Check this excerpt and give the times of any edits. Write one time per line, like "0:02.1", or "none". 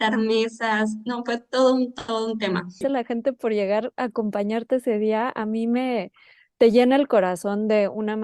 0:02.8